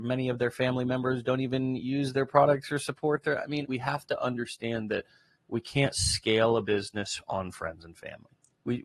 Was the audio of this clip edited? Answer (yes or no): yes